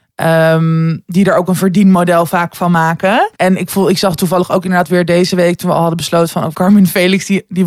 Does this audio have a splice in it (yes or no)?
yes